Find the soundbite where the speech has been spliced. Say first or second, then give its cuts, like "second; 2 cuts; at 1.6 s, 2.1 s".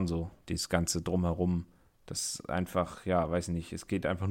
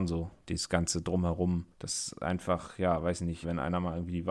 second; 2 cuts; at 1.7 s, 3.4 s